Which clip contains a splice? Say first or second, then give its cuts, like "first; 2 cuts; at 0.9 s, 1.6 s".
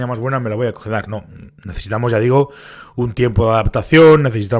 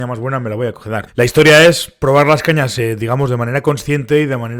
second; 1 cut; at 1.1 s